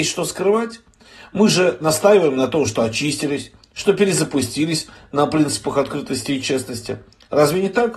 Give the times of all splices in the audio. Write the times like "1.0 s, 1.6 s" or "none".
none